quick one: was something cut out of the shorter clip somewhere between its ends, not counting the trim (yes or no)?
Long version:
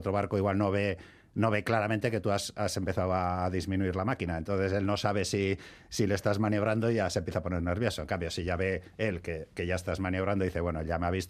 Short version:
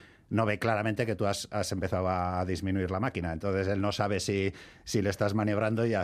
no